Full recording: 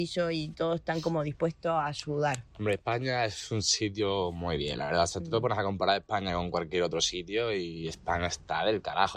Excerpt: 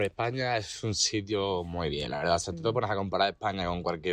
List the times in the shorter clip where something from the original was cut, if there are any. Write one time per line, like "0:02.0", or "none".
none